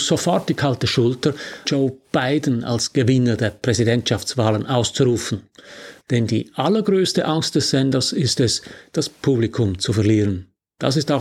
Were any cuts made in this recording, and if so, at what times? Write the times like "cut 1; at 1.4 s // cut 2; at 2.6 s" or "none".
cut 1; at 1.6 s // cut 2; at 6.0 s